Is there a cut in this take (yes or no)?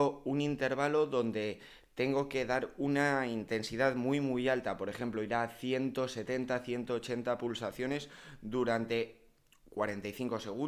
no